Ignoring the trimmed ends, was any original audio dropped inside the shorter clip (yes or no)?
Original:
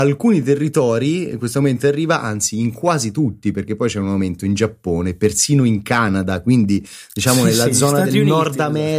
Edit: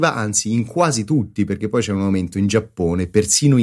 no